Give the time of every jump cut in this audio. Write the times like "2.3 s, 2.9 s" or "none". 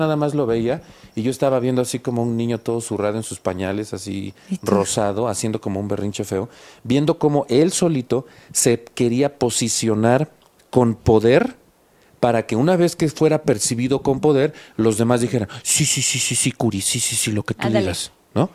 none